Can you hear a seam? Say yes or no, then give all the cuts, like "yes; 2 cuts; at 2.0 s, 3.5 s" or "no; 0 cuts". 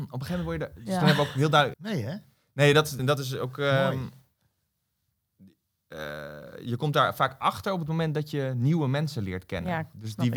yes; 2 cuts; at 1.7 s, 3.0 s